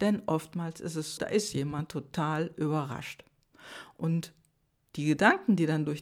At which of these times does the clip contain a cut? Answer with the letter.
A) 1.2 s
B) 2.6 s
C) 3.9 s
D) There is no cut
A